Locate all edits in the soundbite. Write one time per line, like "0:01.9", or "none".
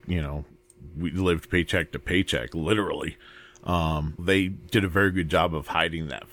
0:04.2